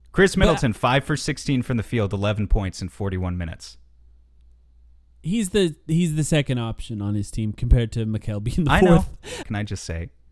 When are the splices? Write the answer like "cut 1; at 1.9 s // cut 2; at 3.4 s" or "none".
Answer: cut 1; at 9.4 s